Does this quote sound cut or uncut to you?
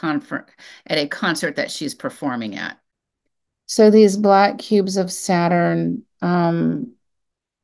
uncut